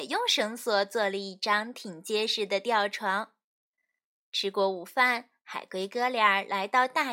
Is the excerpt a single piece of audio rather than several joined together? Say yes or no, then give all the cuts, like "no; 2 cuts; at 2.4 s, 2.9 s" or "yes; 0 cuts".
yes; 0 cuts